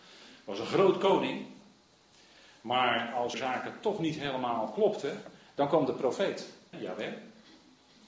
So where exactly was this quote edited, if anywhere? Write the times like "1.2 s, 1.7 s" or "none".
3.3 s, 6.7 s